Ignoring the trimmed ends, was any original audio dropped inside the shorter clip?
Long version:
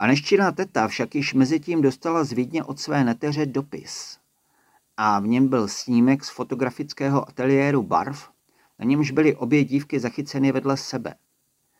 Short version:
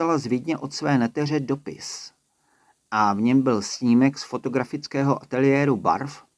no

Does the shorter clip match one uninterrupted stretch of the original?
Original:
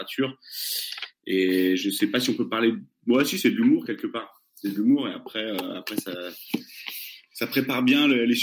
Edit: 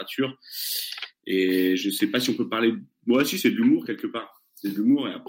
yes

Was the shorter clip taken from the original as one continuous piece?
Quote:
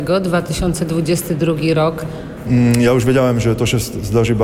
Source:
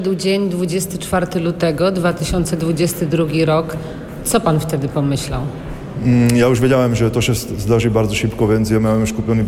no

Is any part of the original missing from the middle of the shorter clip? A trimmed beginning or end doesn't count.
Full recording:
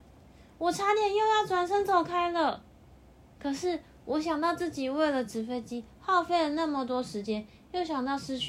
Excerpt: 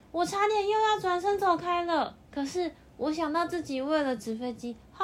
yes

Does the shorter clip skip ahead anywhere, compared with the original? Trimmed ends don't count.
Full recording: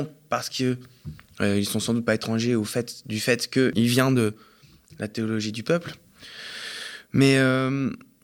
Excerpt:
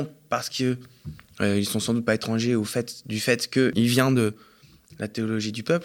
no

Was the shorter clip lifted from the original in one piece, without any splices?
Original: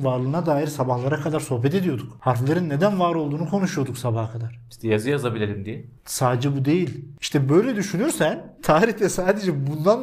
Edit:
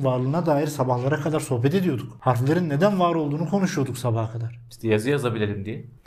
yes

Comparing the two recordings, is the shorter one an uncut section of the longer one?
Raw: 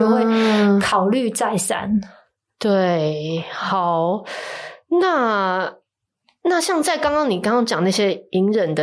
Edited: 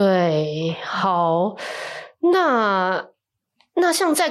yes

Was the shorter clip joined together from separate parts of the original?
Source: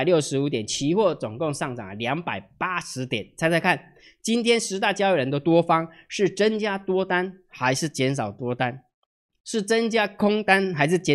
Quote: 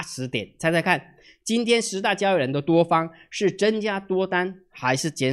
no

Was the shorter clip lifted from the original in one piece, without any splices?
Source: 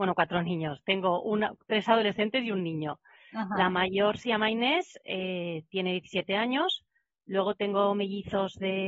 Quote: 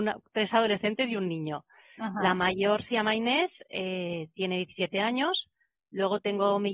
yes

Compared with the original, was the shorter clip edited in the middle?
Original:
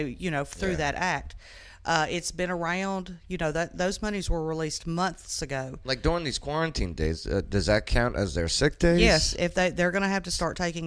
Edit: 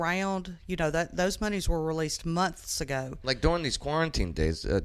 no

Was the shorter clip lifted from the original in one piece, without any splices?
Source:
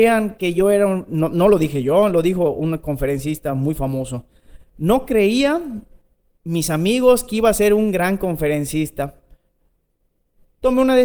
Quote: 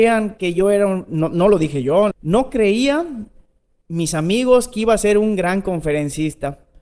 no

